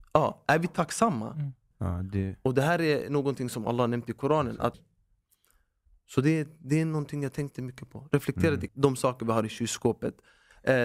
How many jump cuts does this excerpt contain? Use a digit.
3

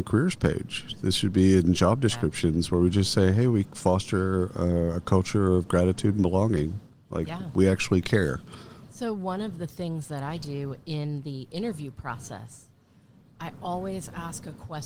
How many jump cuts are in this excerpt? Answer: 0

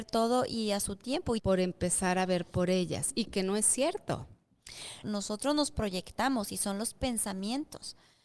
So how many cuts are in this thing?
2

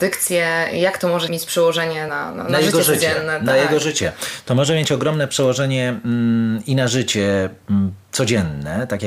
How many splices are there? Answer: 0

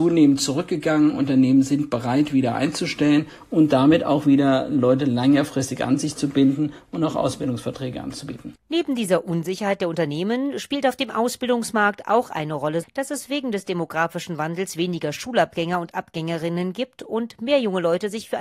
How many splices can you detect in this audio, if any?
1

